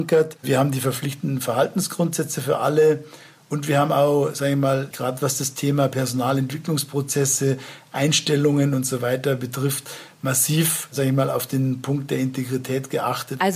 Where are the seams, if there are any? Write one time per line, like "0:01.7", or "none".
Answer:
0:04.9